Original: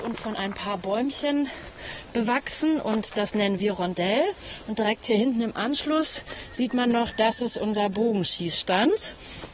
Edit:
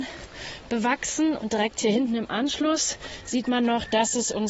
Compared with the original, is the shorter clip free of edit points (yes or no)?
no